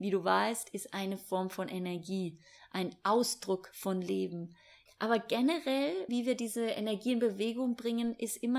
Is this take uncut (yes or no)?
no